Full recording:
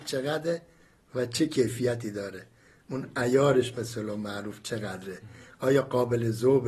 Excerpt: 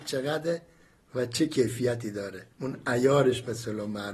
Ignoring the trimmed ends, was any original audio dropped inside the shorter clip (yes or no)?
yes